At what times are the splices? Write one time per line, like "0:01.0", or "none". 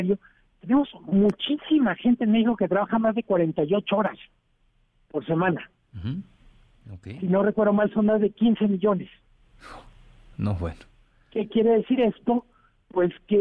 none